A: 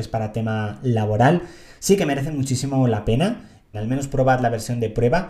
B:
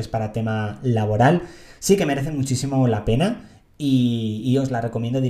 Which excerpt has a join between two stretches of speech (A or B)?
A